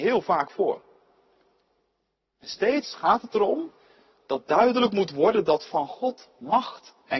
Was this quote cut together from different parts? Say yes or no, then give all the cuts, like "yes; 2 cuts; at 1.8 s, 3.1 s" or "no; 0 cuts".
no; 0 cuts